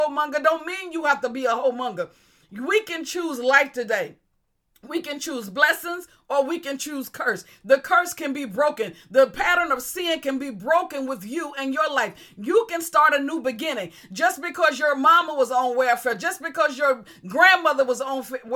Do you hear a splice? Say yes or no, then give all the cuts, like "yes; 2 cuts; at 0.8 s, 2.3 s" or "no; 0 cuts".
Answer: no; 0 cuts